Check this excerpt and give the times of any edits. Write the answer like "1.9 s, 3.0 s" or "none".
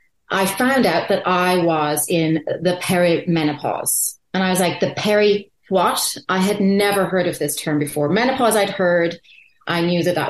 none